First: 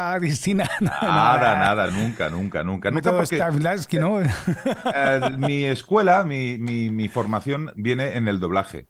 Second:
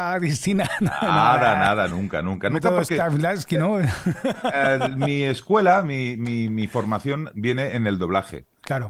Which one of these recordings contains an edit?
second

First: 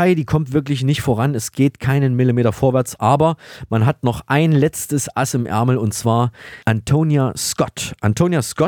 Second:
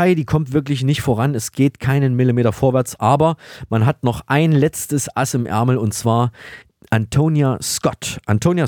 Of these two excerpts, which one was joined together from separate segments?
first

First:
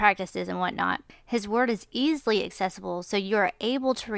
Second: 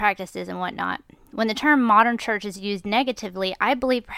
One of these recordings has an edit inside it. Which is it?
first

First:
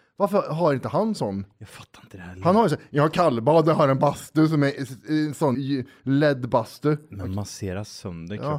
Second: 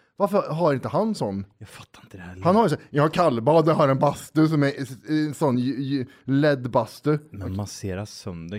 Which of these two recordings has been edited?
first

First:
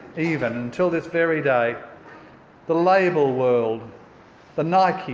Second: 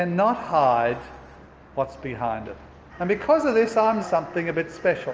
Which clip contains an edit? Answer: second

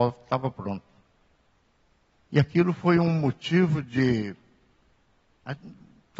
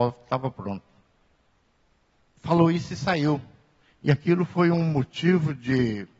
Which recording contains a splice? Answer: first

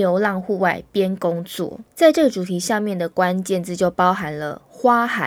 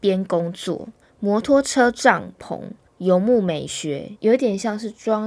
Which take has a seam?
second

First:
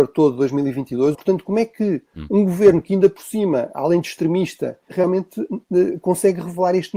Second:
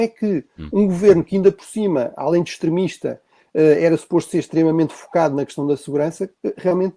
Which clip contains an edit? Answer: first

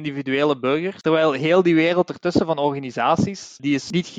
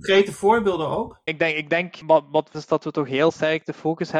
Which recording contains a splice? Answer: second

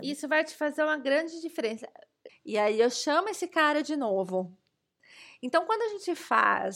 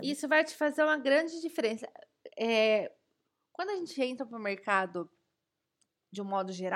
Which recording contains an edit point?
first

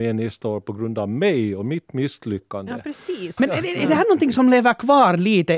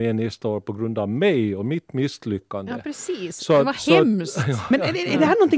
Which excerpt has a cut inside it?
first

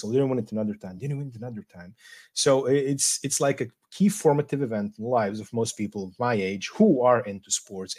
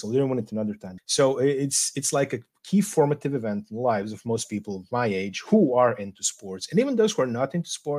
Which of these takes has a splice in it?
second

